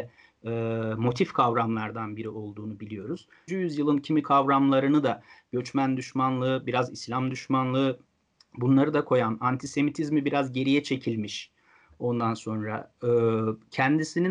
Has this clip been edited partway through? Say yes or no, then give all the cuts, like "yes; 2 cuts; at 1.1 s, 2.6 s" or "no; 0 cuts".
yes; 1 cut; at 3.5 s